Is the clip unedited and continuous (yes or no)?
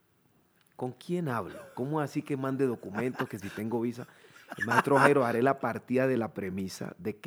yes